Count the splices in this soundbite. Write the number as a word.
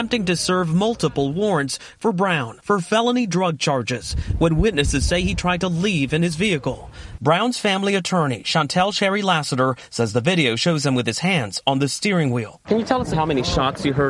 two